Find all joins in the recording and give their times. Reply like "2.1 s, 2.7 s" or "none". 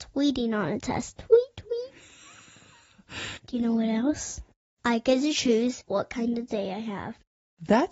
3.4 s